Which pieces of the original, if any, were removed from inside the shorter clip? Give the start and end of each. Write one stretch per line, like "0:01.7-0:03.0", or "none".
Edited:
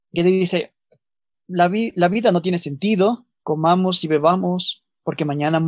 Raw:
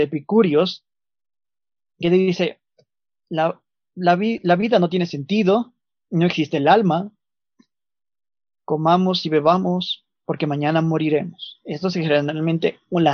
0:03.2-0:03.8
0:05.9-0:08.6